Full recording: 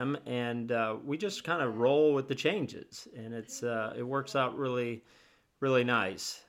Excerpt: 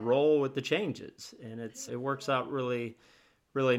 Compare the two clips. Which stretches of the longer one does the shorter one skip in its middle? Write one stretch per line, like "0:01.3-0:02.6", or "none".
0:03.6-0:03.9